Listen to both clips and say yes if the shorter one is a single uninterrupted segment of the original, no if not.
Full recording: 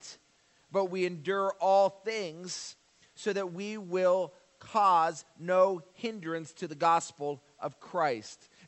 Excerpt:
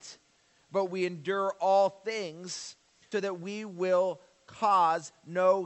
no